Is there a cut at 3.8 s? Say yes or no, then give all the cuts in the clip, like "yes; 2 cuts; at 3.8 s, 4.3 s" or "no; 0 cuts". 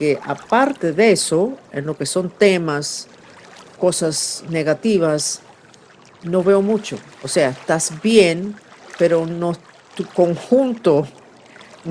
yes; 1 cut; at 3.8 s